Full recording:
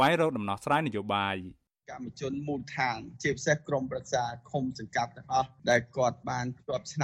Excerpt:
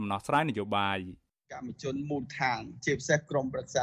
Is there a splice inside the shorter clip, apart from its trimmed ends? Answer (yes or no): no